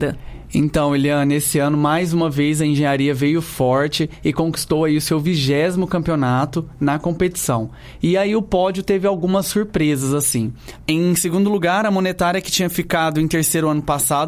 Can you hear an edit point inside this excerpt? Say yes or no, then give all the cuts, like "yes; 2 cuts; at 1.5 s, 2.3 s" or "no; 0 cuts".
no; 0 cuts